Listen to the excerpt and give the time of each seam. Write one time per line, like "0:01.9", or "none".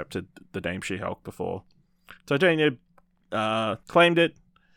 0:03.8